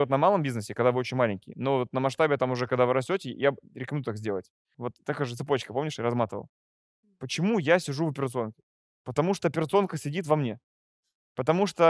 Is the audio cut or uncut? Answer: cut